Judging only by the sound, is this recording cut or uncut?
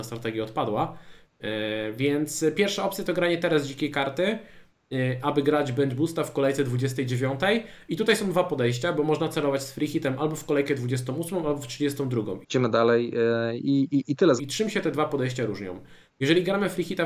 cut